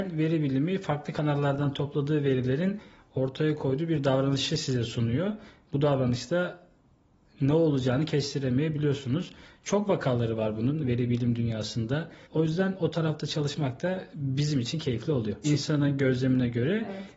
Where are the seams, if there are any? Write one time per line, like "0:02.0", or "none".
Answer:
0:12.2
0:15.4